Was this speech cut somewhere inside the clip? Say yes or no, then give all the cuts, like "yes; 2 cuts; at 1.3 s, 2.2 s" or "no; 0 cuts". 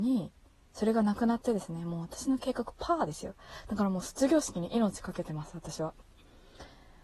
no; 0 cuts